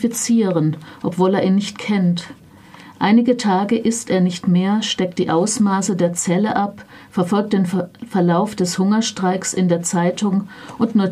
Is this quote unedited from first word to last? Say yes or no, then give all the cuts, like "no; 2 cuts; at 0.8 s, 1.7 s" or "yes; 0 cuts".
yes; 0 cuts